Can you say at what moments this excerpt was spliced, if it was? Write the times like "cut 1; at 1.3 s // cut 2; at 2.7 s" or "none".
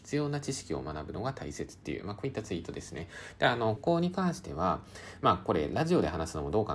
cut 1; at 3.8 s